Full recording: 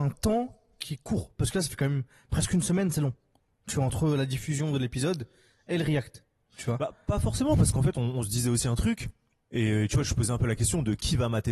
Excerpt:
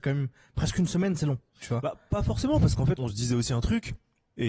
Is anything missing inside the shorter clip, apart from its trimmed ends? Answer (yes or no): yes